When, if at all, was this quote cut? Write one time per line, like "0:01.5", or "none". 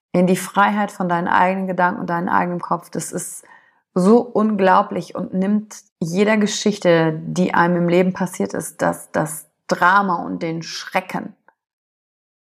0:05.9